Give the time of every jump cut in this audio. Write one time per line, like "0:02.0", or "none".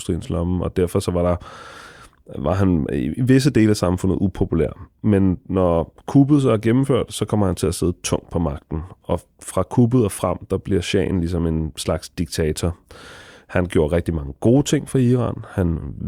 0:06.0